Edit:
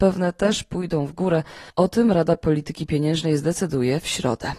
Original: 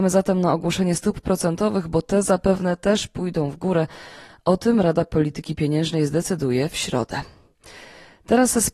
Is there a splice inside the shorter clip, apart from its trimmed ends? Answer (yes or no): yes